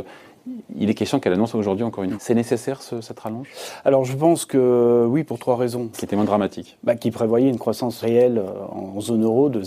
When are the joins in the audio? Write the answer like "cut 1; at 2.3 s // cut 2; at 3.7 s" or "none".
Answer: cut 1; at 2.2 s // cut 2; at 5.9 s // cut 3; at 8.0 s

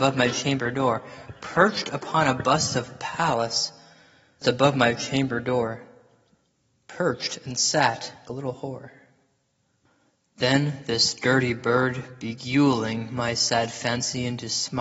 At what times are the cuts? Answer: cut 1; at 4.4 s // cut 2; at 8.3 s

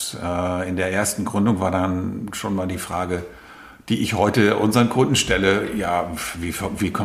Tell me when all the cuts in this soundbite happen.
none

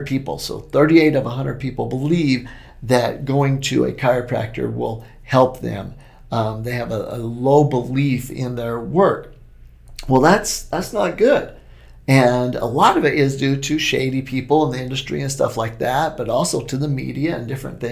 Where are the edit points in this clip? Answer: none

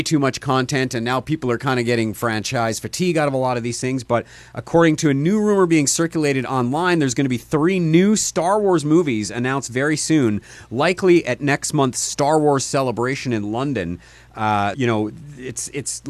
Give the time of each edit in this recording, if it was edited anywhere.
cut 1; at 14.7 s

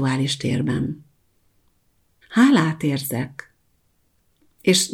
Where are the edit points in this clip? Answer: cut 1; at 2.2 s

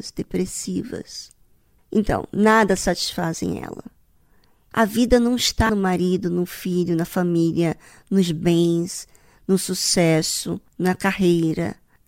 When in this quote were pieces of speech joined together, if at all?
cut 1; at 4.7 s // cut 2; at 10.7 s

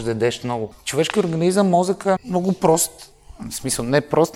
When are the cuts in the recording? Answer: cut 1; at 2.2 s

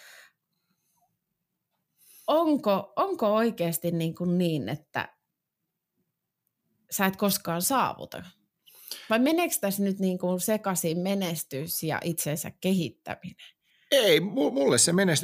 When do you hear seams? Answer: none

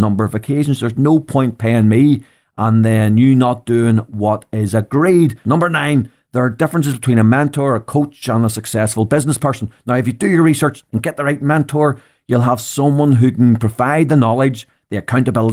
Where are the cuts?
cut 1; at 5.4 s

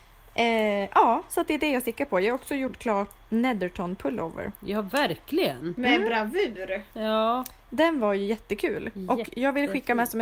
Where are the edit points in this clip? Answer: cut 1; at 3.2 s

